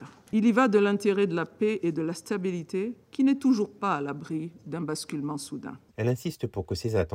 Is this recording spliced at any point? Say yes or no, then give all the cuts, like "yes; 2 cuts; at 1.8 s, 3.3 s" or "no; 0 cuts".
yes; 2 cuts; at 3.1 s, 5.9 s